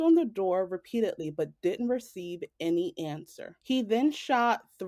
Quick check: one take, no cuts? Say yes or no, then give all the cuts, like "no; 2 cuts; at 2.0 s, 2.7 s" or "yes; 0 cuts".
yes; 0 cuts